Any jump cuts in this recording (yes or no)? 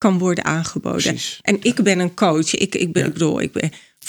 no